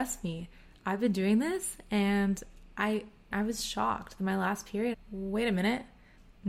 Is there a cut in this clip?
yes; 2 cuts; at 3.3 s, 4.9 s

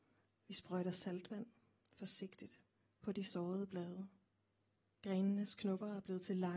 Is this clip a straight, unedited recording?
no; 1 cut; at 4.9 s

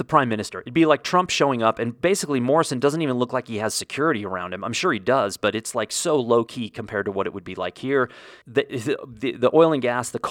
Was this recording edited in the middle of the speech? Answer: yes; 1 cut; at 8.4 s

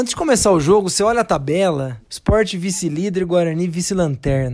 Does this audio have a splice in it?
no; 0 cuts

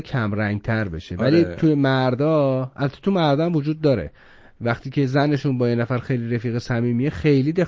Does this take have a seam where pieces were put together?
no; 0 cuts

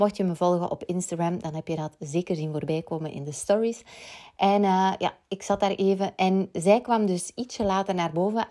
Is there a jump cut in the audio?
no; 0 cuts

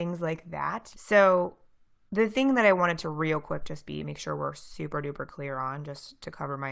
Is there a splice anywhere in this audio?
yes; 1 cut; at 0.9 s

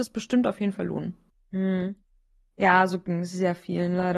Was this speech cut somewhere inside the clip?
yes; 1 cut; at 1.3 s

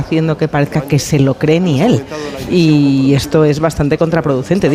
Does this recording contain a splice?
no; 0 cuts

